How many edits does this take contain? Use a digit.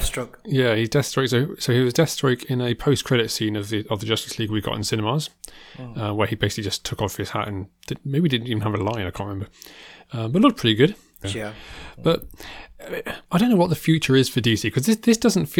2